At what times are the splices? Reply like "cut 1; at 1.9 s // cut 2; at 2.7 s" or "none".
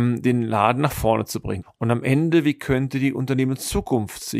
cut 1; at 1.6 s